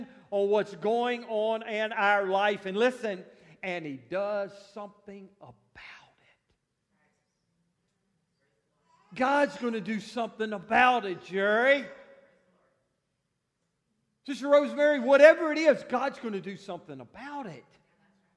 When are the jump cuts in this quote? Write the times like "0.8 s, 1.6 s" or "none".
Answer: none